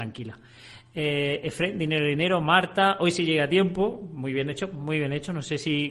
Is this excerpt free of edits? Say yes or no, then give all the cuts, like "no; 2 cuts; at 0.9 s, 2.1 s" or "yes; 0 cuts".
yes; 0 cuts